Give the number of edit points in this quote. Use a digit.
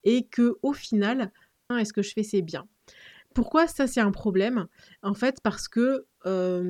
1